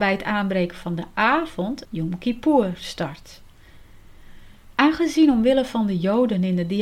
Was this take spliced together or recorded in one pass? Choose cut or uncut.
cut